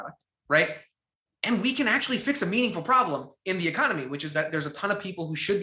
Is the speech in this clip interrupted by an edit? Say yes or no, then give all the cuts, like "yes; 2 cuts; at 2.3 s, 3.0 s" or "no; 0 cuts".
no; 0 cuts